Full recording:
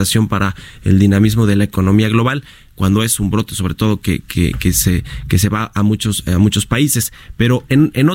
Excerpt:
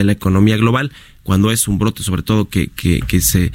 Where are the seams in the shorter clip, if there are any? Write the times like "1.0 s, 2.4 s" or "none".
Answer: none